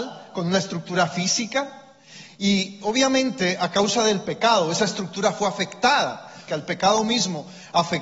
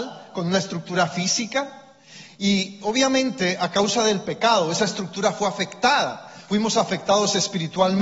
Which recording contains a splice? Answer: first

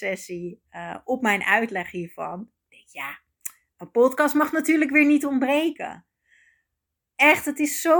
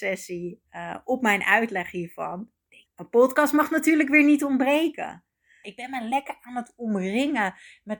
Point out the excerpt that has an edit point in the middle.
second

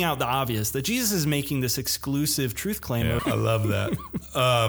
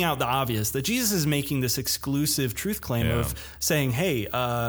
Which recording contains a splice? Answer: first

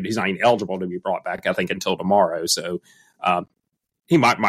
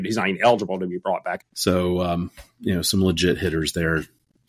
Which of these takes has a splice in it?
second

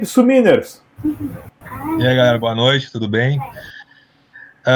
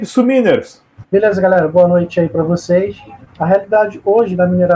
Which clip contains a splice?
second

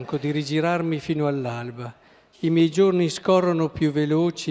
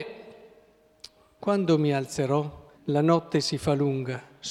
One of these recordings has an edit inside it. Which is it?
second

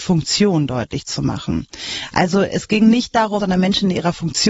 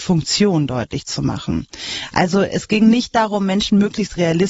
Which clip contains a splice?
first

